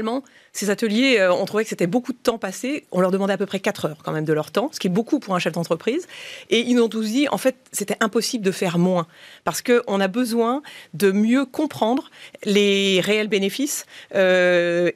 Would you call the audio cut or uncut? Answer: uncut